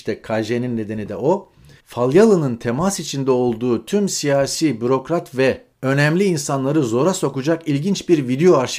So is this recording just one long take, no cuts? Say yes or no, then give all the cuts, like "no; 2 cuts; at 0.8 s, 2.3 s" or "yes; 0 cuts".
no; 2 cuts; at 1.8 s, 5.7 s